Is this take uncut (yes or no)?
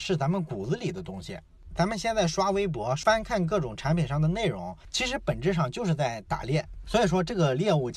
yes